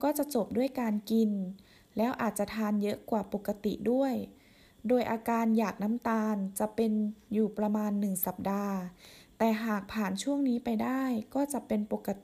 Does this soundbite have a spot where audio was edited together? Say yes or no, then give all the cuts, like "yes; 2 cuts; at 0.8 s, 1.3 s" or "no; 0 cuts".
no; 0 cuts